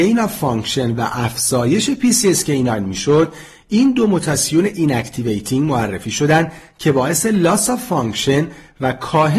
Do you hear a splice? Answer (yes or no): no